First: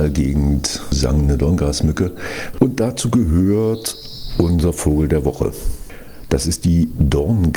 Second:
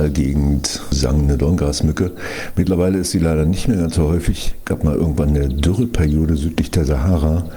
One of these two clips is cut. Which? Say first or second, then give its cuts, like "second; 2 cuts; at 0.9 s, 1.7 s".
first; 1 cut; at 2.5 s